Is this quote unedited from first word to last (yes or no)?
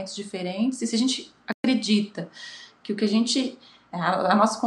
yes